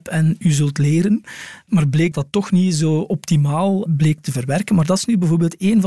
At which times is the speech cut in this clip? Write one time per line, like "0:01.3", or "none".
0:02.1